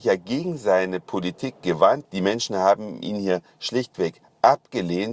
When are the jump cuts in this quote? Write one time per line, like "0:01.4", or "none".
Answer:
0:02.0

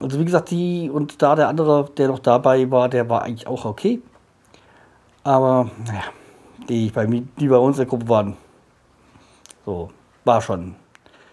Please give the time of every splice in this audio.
none

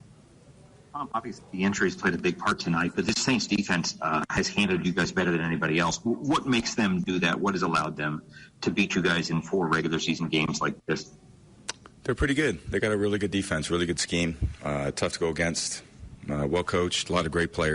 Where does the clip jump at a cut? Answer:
none

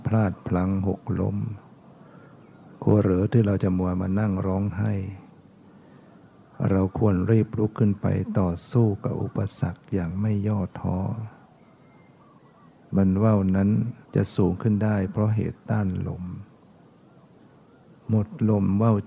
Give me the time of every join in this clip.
0:14.1

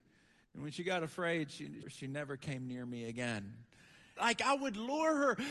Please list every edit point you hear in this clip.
0:01.8
0:04.2

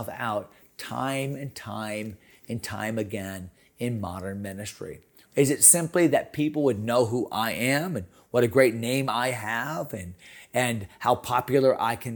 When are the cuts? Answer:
0:05.2

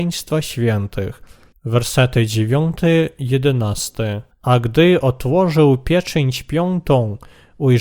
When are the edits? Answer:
0:01.5
0:04.3

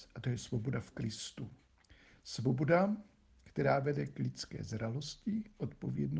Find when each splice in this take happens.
none

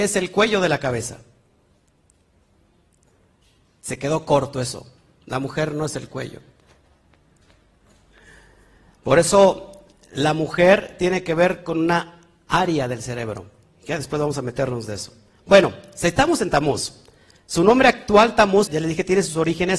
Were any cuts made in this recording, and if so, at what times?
0:18.7

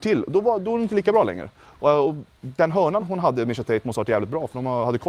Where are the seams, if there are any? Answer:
0:03.0

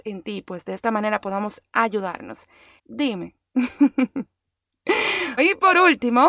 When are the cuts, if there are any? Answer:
0:02.8
0:05.4

